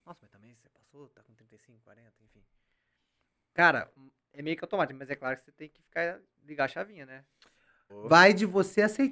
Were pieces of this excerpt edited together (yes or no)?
yes